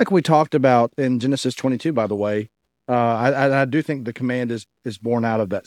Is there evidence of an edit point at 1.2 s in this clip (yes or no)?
no